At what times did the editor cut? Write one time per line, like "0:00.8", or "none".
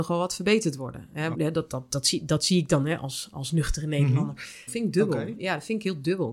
0:01.3
0:04.7